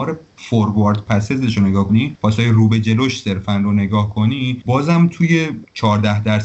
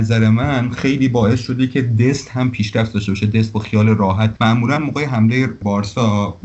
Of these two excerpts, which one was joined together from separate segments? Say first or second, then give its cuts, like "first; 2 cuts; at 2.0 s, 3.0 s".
first; 1 cut; at 1.9 s